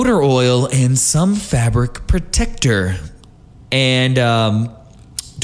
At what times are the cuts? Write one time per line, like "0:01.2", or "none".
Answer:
0:03.7